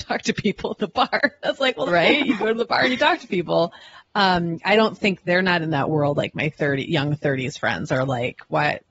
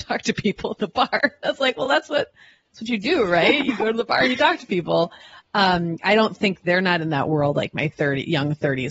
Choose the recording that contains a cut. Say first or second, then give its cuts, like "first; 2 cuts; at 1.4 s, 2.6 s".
first; 1 cut; at 1.9 s